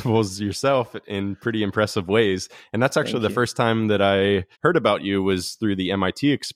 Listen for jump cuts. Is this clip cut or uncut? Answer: cut